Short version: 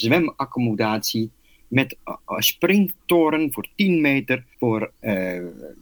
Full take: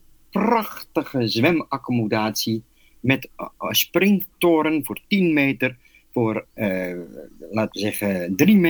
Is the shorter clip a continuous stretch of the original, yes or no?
no